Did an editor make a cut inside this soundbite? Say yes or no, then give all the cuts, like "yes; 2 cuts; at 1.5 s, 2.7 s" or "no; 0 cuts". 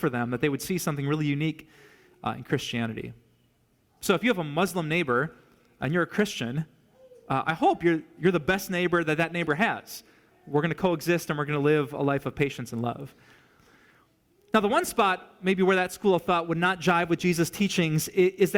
no; 0 cuts